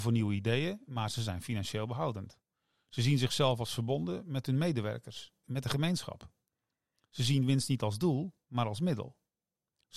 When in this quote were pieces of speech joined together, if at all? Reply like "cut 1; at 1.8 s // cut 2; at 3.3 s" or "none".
cut 1; at 5.4 s